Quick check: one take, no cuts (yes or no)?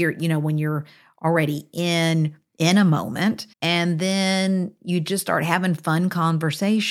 no